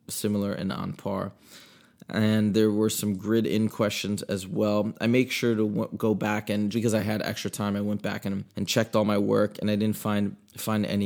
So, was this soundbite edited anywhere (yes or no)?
yes